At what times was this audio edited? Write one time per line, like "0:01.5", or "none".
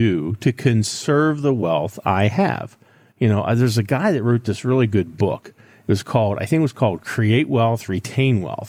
none